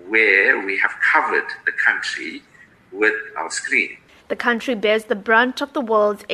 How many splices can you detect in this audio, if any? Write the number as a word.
one